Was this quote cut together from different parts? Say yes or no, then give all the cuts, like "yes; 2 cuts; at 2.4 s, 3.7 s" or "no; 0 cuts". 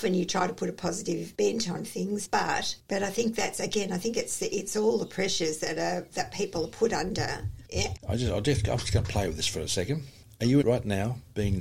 yes; 3 cuts; at 2.2 s, 8.0 s, 10.6 s